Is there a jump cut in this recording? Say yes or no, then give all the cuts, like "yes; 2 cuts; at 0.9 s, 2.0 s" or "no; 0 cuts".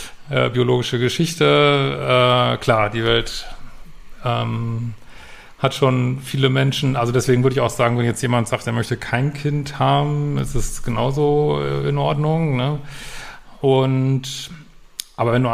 no; 0 cuts